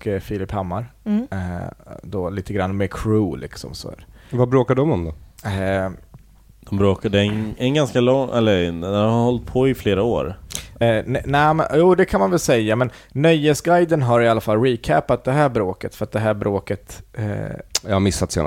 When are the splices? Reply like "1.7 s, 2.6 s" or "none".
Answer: none